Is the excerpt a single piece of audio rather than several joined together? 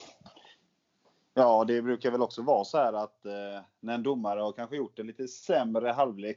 yes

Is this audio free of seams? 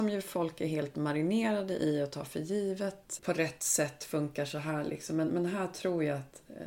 no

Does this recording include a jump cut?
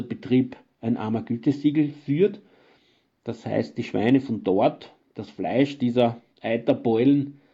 no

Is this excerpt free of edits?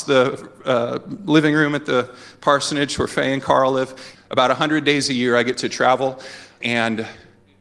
no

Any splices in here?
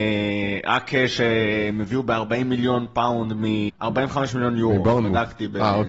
yes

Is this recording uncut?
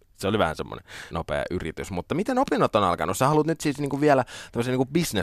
no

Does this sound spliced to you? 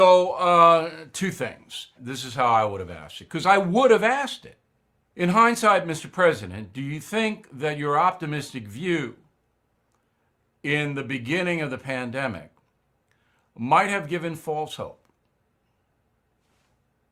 yes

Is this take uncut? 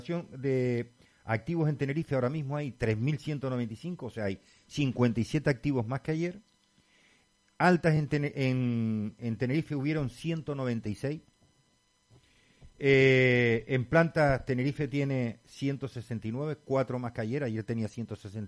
yes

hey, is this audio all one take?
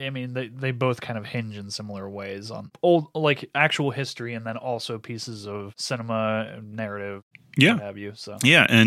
yes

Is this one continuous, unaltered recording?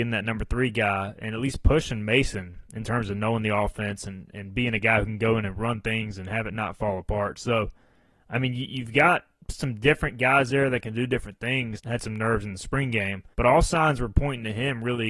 no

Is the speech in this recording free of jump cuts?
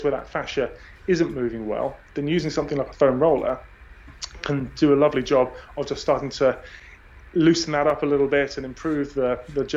yes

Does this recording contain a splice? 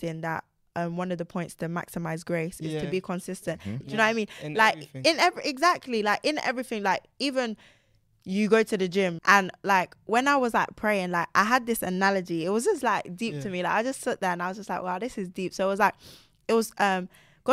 yes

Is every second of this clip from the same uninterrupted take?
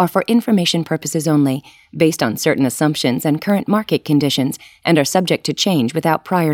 yes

